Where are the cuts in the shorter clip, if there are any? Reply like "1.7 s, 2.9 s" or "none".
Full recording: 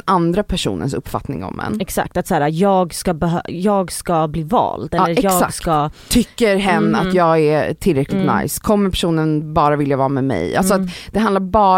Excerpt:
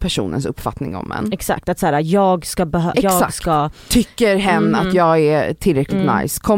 2.9 s